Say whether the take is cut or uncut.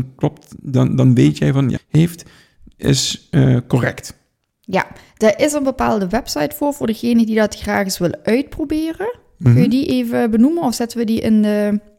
cut